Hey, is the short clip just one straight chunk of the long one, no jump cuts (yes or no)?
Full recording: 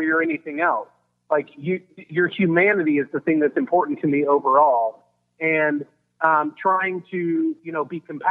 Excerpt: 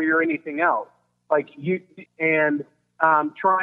no